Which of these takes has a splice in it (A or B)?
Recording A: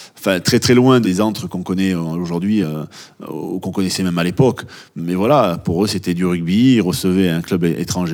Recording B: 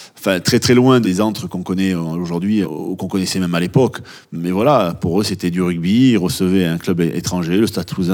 B